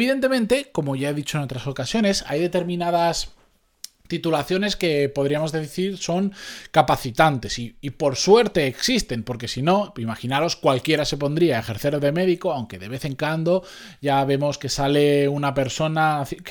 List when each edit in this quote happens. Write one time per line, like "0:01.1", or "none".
none